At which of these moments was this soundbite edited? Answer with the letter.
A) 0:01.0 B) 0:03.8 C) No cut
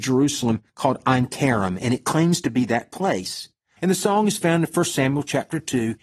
B